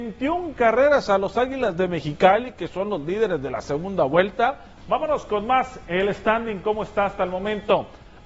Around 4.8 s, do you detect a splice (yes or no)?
yes